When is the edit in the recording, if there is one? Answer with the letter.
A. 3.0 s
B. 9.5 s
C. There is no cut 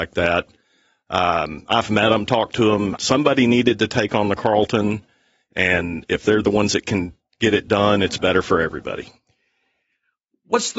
A